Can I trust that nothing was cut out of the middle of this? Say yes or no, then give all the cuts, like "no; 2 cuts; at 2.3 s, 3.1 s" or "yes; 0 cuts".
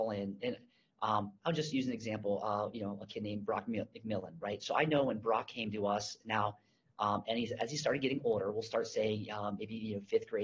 yes; 0 cuts